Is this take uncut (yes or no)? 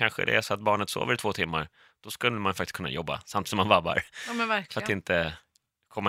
yes